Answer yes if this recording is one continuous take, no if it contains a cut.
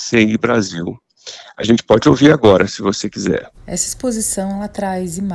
no